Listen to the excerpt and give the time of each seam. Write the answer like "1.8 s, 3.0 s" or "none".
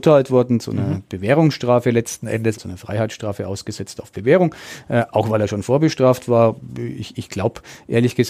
2.5 s

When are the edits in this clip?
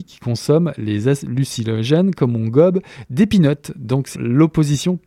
4.1 s

